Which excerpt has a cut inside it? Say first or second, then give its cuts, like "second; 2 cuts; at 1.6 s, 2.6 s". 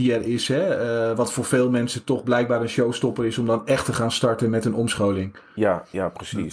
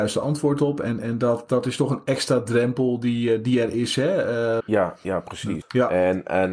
second; 2 cuts; at 4.6 s, 5.6 s